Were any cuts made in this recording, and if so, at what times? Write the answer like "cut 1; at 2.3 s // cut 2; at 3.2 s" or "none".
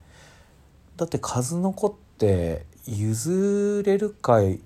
cut 1; at 2.7 s